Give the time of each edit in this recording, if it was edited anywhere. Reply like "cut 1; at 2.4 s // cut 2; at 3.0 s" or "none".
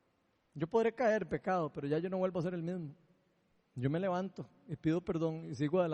none